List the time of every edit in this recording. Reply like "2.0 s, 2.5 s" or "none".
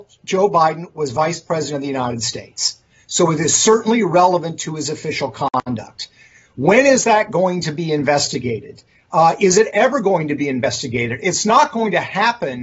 none